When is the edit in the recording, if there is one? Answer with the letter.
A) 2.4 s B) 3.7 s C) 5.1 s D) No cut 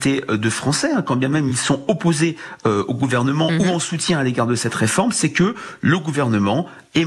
D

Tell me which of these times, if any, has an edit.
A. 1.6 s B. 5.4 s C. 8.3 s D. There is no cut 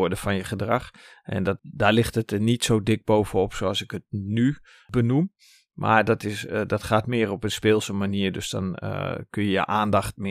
A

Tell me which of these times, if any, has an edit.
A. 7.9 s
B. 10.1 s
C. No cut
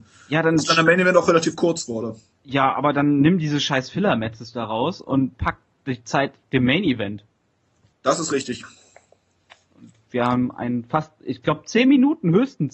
A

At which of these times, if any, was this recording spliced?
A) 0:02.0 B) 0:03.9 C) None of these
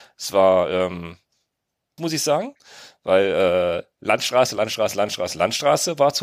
A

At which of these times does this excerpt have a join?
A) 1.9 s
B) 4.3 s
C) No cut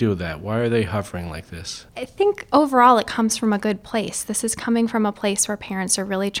A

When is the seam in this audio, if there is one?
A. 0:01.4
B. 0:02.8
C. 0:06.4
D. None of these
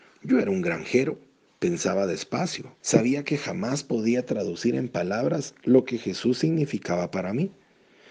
B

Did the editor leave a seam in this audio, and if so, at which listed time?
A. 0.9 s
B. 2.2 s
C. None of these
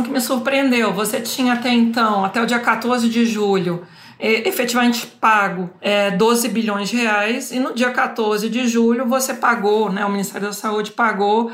C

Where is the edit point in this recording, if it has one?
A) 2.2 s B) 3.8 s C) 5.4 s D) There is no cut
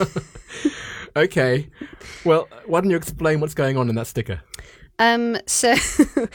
D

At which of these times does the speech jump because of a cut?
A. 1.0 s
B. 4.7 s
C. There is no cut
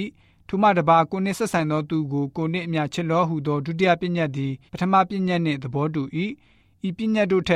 B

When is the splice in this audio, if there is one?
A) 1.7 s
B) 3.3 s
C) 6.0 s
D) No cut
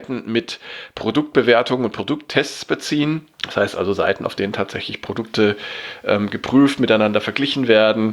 B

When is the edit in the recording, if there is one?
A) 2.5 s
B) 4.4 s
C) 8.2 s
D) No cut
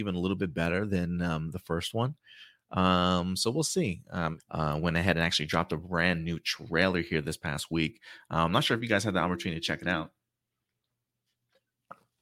B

